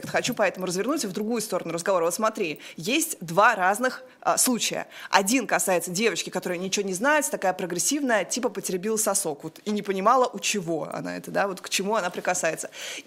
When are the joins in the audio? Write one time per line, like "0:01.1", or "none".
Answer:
none